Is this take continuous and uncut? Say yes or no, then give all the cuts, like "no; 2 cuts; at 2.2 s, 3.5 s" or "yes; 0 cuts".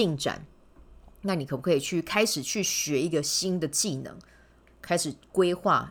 no; 1 cut; at 4.7 s